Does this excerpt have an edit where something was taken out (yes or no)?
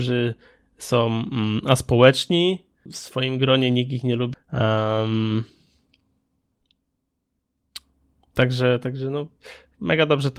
yes